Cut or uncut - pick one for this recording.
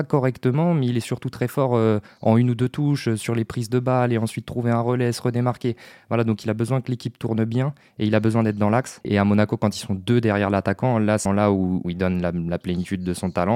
cut